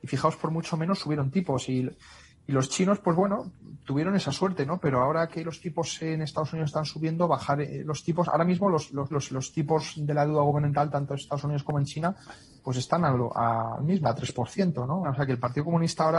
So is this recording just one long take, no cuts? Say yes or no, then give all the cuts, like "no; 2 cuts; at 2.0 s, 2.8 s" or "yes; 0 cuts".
no; 3 cuts; at 9.1 s, 14.0 s, 15.0 s